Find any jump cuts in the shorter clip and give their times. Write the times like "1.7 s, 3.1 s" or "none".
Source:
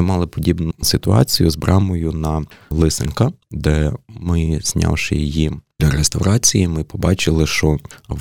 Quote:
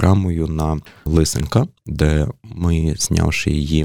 none